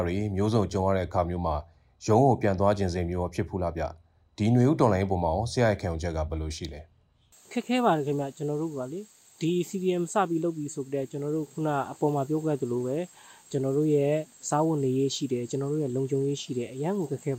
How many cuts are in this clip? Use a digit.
0